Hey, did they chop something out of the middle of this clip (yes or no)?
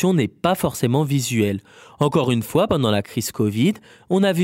no